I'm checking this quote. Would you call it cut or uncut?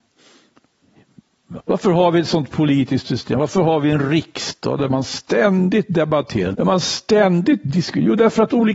cut